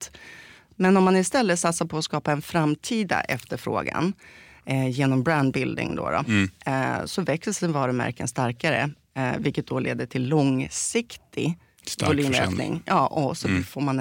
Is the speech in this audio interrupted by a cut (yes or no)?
no